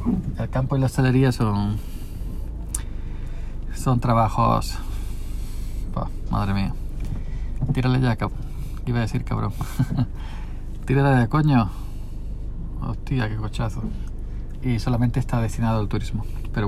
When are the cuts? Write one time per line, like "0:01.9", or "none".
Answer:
0:14.6